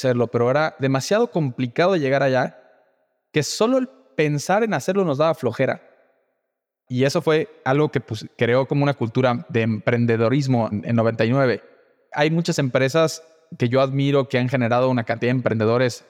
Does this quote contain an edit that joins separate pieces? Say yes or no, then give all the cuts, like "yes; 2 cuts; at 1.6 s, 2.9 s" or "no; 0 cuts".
yes; 1 cut; at 6.9 s